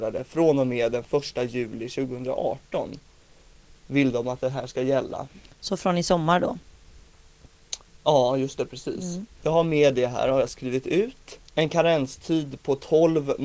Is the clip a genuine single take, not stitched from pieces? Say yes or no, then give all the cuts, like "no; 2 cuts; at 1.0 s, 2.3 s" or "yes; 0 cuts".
no; 2 cuts; at 9.3 s, 11.4 s